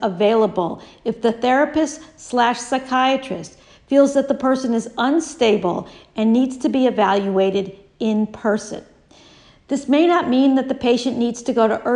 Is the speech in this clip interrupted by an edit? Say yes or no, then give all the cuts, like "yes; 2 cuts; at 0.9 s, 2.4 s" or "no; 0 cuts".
no; 0 cuts